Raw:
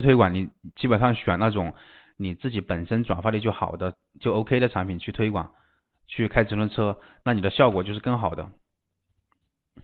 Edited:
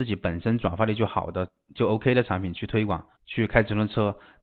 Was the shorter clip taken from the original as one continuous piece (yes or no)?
no